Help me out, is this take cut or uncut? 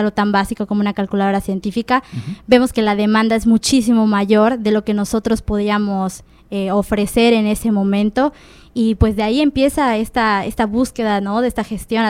uncut